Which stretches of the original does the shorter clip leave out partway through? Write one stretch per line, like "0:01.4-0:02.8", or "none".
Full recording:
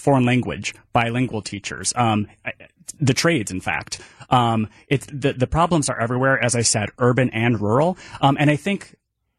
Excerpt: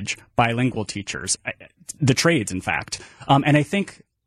0:01.9-0:02.4
0:04.2-0:08.2